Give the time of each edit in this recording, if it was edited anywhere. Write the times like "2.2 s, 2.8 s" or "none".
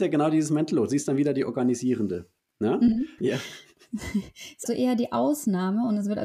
3.2 s, 4.7 s